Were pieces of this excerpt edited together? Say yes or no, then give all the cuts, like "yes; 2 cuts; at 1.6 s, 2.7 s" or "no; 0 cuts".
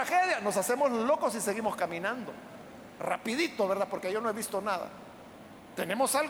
no; 0 cuts